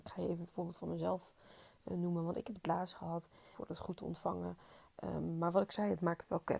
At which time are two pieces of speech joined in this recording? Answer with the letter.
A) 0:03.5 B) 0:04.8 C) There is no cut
A